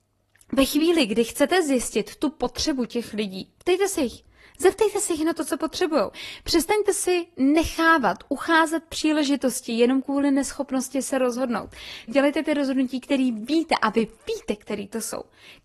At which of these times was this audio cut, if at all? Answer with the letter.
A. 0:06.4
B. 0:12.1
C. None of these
B